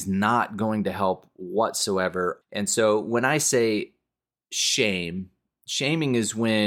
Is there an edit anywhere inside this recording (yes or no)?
yes